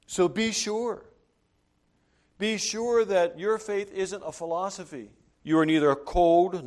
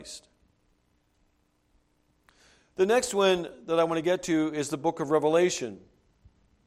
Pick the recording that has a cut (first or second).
first